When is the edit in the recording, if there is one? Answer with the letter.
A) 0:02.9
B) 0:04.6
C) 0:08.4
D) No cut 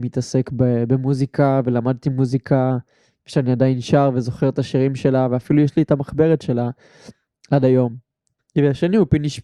C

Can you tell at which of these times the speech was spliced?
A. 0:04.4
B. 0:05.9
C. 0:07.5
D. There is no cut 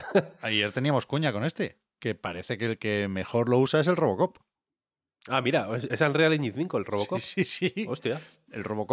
D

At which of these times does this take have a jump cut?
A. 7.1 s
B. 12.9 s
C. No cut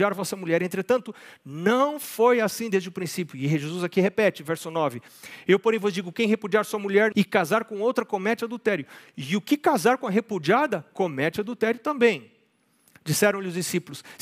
A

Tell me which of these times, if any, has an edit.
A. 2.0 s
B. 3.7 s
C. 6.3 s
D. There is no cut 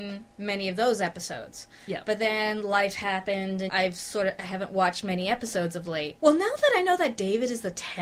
B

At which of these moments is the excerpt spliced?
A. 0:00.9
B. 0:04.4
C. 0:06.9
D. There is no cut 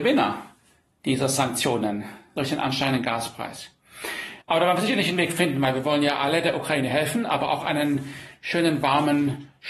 B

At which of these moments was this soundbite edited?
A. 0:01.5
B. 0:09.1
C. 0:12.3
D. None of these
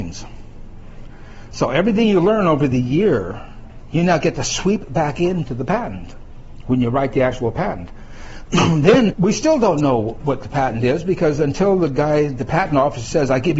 B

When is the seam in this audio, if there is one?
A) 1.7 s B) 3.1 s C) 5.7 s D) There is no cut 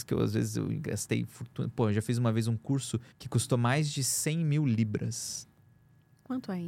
B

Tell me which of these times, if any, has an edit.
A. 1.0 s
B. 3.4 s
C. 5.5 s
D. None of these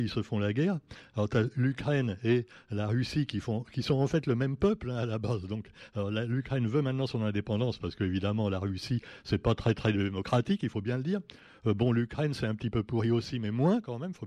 D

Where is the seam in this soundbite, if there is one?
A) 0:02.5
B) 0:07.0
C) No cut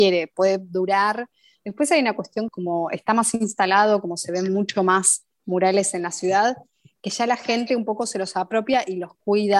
A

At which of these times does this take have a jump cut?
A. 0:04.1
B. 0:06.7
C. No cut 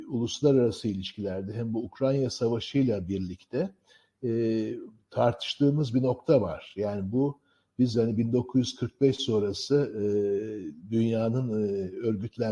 C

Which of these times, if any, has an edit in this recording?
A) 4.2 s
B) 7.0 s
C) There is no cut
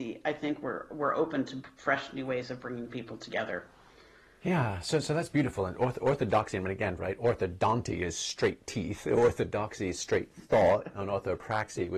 B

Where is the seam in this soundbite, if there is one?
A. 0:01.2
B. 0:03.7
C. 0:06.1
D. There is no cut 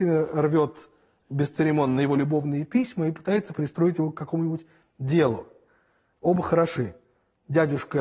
C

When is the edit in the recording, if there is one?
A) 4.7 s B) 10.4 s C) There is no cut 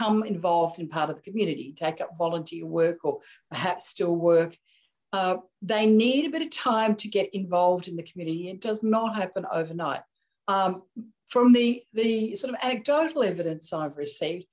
B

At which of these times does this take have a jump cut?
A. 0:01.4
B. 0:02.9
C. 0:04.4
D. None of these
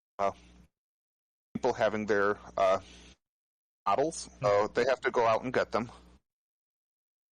C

